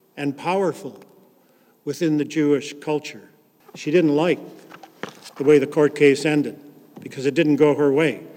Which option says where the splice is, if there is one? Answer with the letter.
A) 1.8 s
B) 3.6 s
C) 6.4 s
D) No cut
B